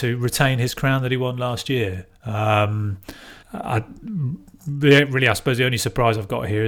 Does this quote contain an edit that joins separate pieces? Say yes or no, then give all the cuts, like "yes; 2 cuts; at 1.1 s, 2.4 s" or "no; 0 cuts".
yes; 1 cut; at 3.4 s